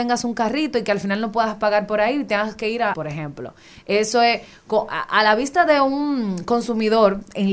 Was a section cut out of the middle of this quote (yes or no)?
yes